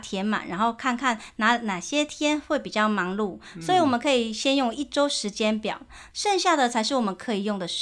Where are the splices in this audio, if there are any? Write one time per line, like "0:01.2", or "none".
0:06.1